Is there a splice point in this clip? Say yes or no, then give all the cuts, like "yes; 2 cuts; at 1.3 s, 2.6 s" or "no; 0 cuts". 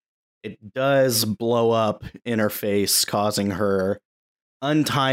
no; 0 cuts